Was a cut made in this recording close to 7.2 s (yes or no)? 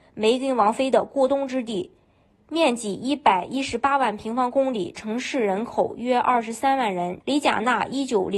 yes